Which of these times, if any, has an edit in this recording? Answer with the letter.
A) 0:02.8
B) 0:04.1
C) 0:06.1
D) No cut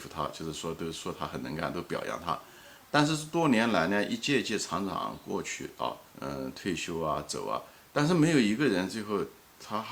C